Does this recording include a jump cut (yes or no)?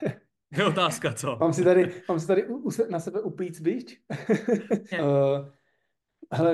yes